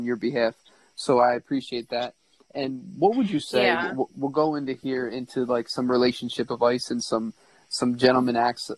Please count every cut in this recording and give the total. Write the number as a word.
zero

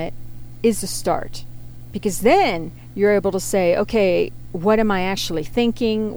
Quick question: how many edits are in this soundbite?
zero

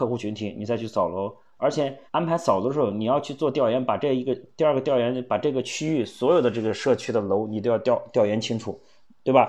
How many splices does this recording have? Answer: one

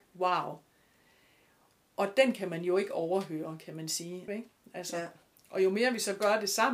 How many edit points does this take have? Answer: one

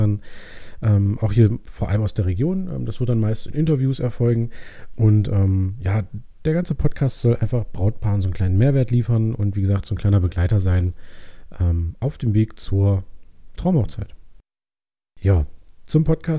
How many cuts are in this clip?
one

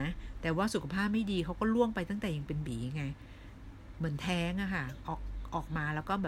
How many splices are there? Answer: one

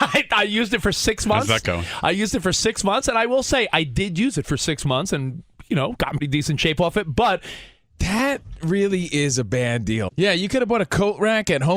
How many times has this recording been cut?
three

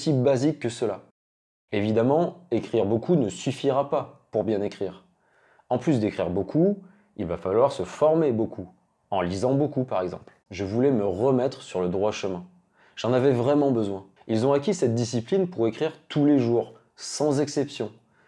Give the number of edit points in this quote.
two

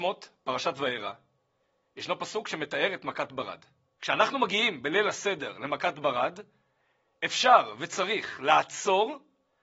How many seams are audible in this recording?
one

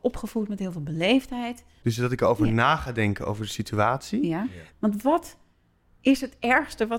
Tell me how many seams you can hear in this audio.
two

